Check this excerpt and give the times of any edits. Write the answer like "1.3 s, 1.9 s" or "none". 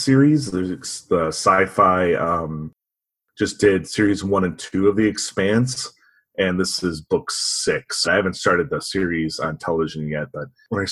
8.0 s